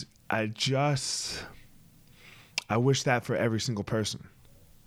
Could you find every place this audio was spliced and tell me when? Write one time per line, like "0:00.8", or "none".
none